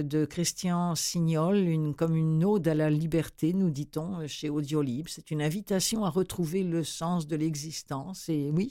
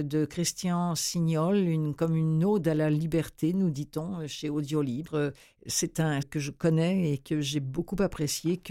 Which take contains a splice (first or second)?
second